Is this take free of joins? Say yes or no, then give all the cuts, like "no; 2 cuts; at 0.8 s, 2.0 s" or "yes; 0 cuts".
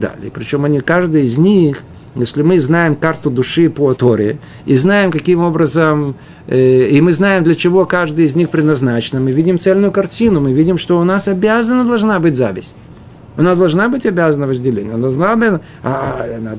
no; 1 cut; at 3.9 s